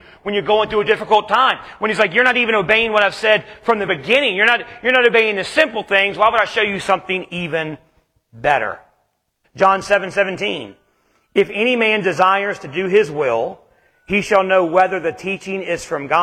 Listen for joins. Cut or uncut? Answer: cut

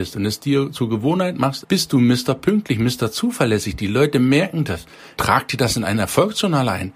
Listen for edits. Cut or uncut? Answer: cut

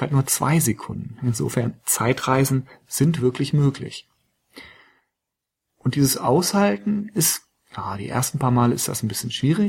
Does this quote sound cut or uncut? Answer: uncut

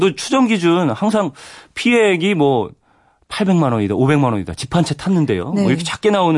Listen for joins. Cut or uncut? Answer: uncut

